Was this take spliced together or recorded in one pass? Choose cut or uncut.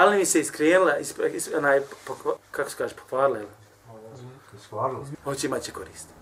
cut